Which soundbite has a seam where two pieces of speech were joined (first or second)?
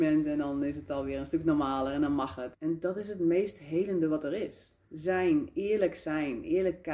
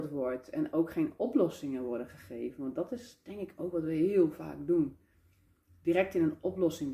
first